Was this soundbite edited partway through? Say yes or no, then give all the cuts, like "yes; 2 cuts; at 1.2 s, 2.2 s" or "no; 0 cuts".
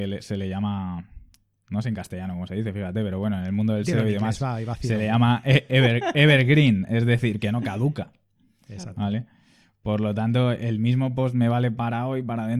no; 0 cuts